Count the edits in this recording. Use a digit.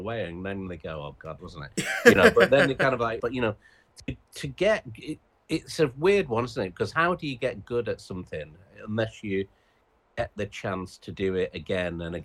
2